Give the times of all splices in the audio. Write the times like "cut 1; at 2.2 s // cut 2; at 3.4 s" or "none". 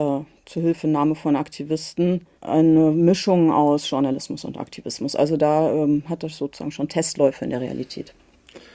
cut 1; at 2.3 s